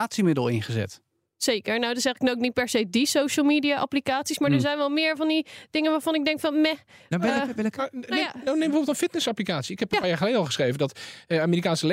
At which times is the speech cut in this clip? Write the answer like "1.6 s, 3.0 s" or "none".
none